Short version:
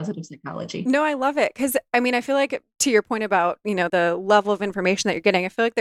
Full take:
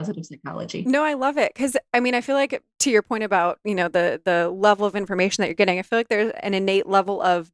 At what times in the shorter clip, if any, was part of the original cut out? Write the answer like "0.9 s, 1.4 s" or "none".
3.9 s